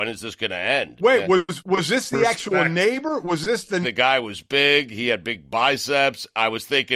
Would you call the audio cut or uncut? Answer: cut